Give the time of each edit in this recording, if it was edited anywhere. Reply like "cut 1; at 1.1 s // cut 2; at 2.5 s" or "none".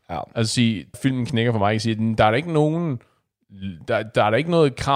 cut 1; at 0.9 s